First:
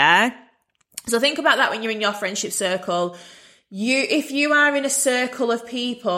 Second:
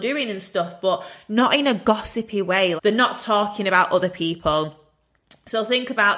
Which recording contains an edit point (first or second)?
second